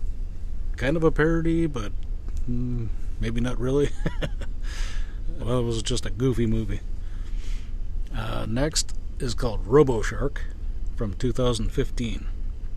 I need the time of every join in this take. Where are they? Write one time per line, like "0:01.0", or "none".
0:05.4